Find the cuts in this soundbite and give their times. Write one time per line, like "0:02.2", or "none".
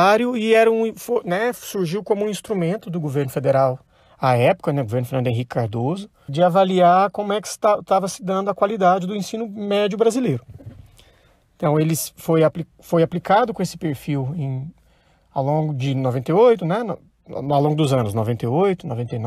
0:06.3